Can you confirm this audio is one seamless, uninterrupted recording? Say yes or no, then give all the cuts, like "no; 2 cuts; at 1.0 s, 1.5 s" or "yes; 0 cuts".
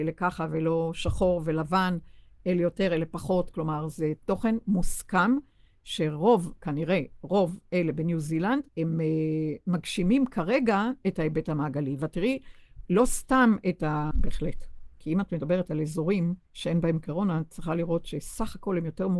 no; 3 cuts; at 8.7 s, 14.1 s, 16.4 s